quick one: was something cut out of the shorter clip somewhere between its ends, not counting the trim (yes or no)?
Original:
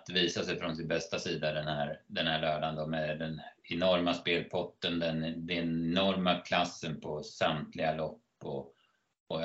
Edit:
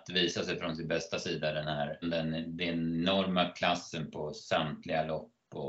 yes